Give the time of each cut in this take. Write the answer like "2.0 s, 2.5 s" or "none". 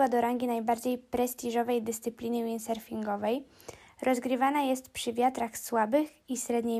none